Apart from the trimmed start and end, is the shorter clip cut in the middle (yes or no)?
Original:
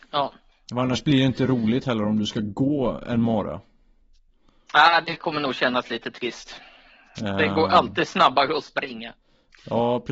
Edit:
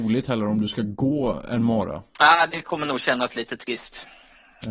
yes